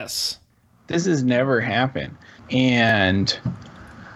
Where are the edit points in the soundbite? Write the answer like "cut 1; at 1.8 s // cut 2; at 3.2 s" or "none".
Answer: cut 1; at 2.4 s